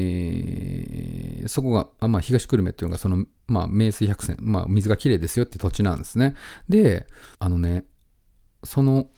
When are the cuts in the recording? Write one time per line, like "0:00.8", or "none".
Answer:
0:07.3